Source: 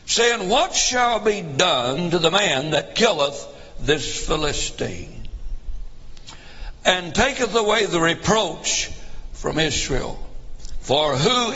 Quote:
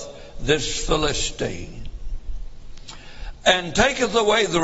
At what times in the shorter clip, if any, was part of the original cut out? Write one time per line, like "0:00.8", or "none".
none